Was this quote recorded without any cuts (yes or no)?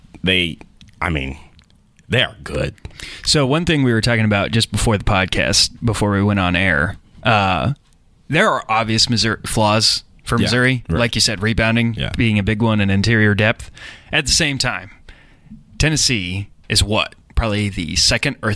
yes